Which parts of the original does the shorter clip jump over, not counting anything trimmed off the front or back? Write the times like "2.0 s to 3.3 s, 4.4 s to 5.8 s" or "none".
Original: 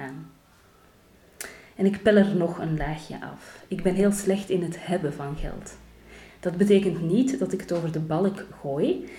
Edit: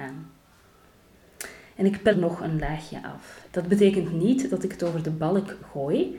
2.1 s to 2.3 s, 3.7 s to 6.4 s